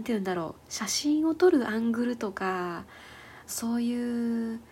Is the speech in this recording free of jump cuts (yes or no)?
no